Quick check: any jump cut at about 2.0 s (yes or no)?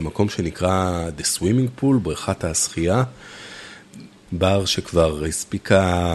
no